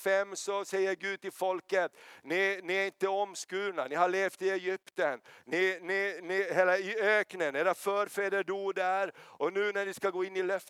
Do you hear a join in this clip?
no; 0 cuts

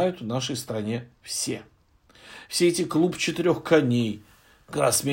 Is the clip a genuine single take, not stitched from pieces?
no; 1 cut; at 2.5 s

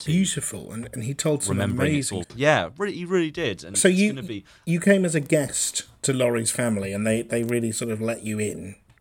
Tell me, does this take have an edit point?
yes; 1 cut; at 2.2 s

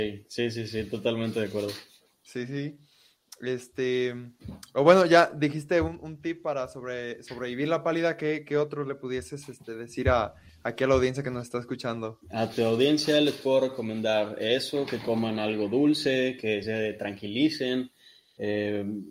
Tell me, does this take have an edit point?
no; 0 cuts

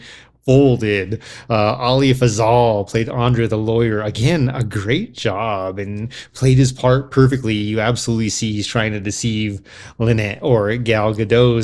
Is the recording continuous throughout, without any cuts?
yes; 0 cuts

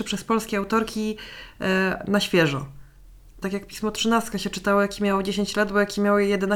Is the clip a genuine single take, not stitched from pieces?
no; 1 cut; at 3.4 s

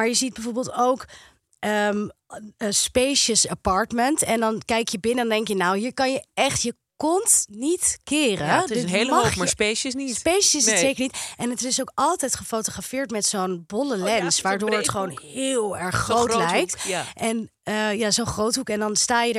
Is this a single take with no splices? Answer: yes; 0 cuts

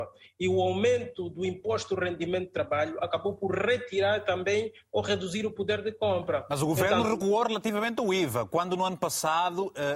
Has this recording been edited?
no; 0 cuts

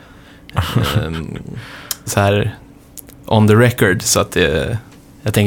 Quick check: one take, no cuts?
no; 1 cut; at 2.1 s

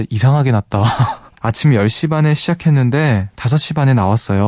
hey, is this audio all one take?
no; 1 cut; at 1.4 s

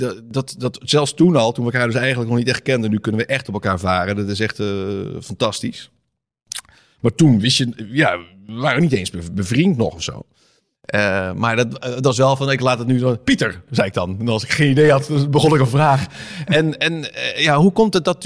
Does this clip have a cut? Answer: no; 0 cuts

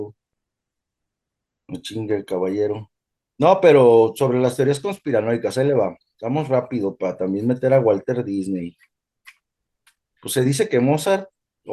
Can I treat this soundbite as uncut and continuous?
yes; 0 cuts

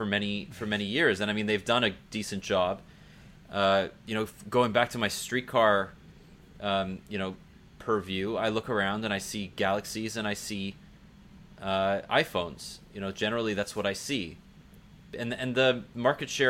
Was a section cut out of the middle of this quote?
yes; 1 cut; at 4.0 s

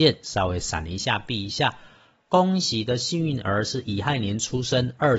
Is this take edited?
no; 0 cuts

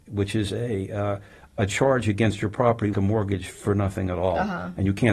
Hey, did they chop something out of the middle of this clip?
yes; 1 cut; at 2.9 s

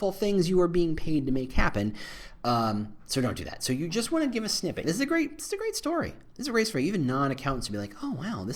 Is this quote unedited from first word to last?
no; 1 cut; at 4.8 s

